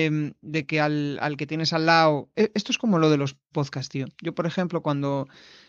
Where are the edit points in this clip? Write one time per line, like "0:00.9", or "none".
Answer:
0:02.3